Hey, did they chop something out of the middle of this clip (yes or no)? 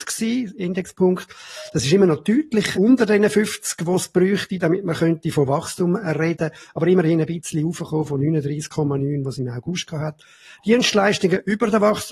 yes